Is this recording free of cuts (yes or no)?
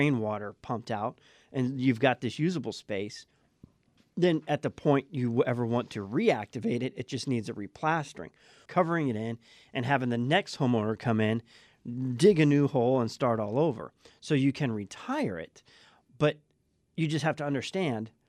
no